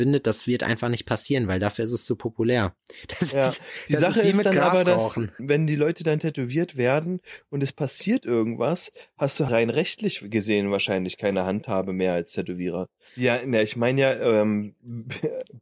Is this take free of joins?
no; 3 cuts; at 5.4 s, 9.5 s, 13.1 s

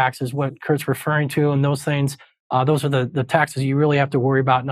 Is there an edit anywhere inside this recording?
no; 0 cuts

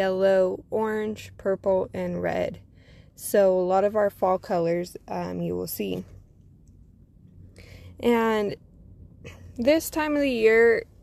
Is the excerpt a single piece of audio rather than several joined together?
yes; 0 cuts

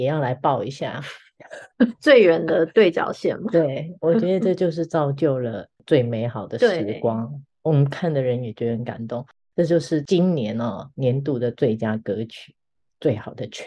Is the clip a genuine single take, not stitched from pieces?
yes; 0 cuts

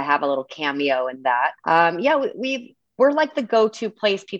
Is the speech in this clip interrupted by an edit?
yes; 1 cut; at 1.6 s

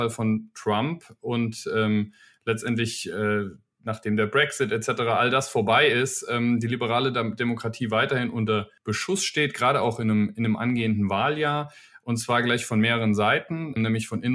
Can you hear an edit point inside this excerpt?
no; 0 cuts

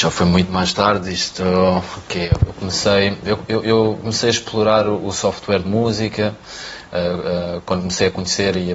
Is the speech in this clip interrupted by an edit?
no; 0 cuts

